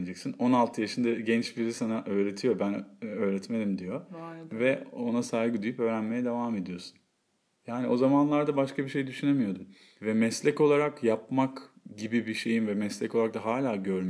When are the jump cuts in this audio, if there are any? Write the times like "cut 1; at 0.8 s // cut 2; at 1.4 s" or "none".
none